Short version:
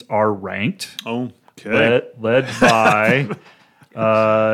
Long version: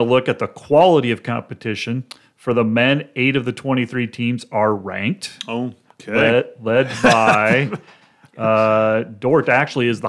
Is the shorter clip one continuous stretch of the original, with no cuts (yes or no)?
yes